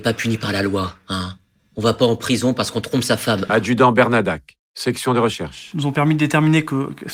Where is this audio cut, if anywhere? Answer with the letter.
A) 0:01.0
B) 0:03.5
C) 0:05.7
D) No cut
B